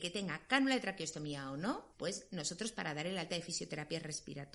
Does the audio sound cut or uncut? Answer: cut